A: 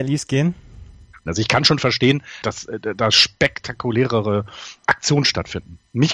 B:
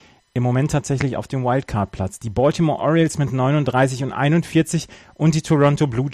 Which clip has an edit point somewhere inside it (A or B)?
A